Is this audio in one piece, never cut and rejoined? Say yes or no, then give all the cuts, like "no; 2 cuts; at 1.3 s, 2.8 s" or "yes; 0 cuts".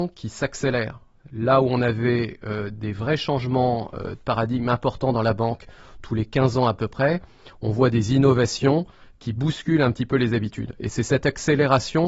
yes; 0 cuts